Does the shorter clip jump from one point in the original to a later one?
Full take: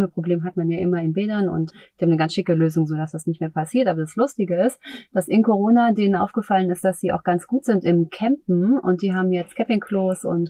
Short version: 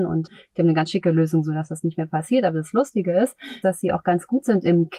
yes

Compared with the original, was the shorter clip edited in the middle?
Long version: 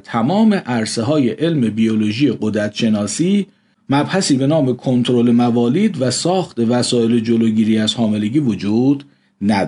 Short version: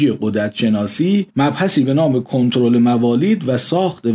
yes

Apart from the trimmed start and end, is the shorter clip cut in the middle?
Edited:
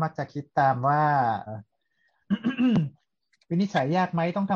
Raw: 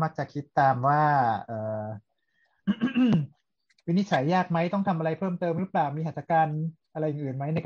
yes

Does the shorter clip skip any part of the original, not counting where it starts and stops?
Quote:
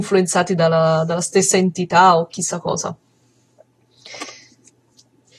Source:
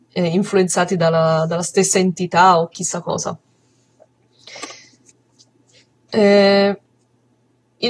no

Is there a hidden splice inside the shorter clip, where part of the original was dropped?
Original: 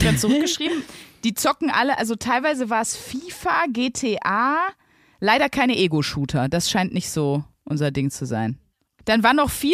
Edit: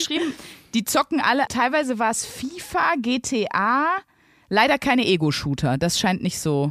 yes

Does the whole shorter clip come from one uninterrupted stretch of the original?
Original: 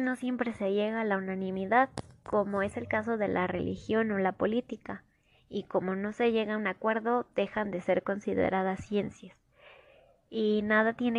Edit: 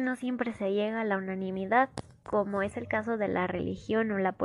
yes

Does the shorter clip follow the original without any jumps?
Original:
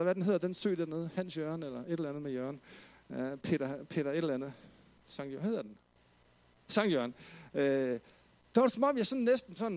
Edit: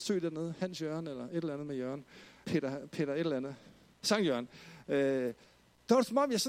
no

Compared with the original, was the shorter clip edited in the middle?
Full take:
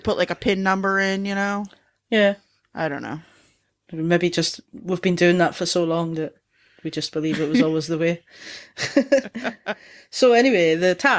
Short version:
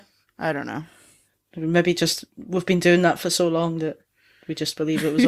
no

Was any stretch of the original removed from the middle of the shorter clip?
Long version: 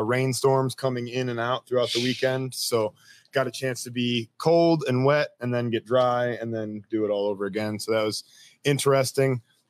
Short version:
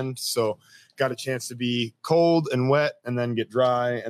no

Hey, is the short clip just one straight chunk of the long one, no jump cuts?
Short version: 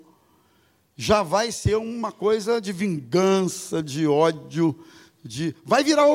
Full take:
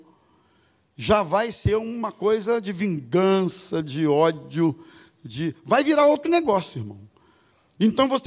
yes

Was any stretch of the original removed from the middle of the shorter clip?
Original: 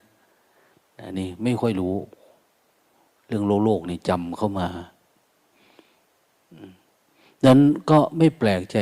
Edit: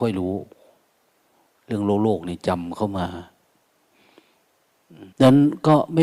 yes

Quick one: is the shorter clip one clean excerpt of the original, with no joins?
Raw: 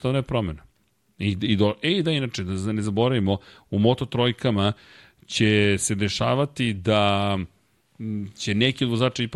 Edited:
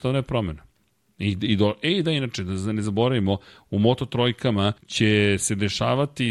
no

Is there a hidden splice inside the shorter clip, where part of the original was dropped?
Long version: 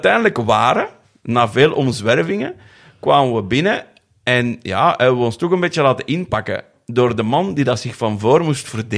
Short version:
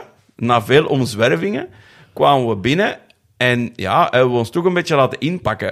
no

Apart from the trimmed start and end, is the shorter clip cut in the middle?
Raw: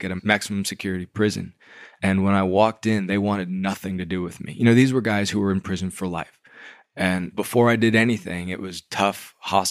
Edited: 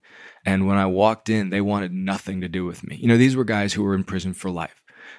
no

